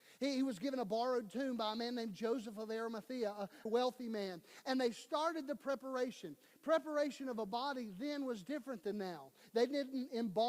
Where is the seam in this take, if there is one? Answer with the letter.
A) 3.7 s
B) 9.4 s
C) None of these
A